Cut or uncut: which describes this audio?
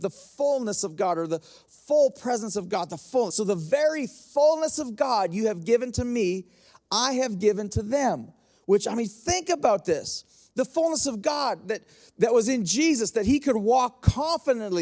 uncut